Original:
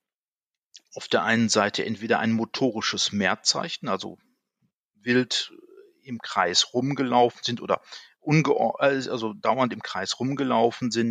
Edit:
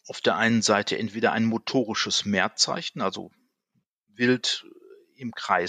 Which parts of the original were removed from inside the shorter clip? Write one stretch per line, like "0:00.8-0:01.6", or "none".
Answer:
none